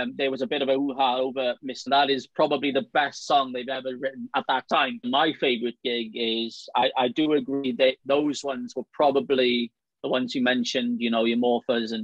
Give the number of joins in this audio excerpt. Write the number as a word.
one